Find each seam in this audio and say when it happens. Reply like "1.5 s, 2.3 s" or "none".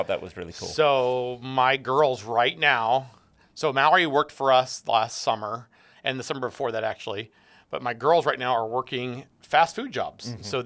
none

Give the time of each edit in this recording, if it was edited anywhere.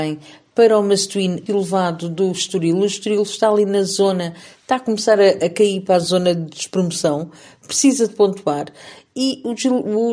1.5 s

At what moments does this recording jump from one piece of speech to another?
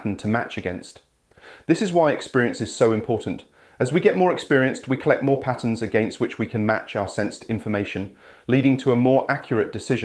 none

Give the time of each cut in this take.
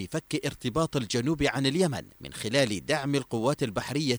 2.1 s

